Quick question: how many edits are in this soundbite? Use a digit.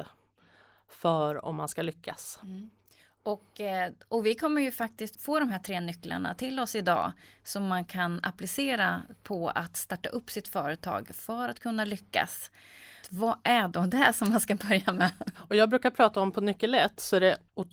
3